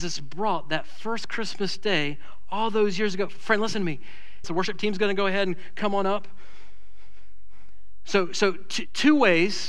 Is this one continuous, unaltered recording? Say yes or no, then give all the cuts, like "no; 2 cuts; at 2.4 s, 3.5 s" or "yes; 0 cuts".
no; 1 cut; at 4.4 s